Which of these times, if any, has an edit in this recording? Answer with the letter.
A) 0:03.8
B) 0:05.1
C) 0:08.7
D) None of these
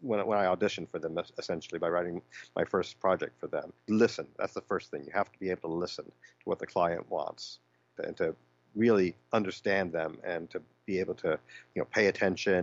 D